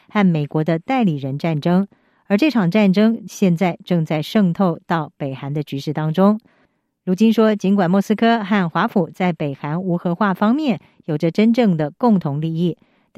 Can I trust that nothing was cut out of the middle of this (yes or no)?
yes